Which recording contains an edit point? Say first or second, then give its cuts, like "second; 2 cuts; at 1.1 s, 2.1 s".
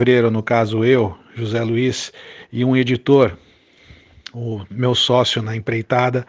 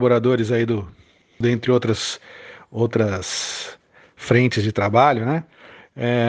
second; 1 cut; at 1.4 s